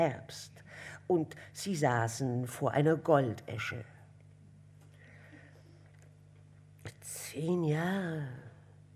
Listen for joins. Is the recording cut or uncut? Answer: uncut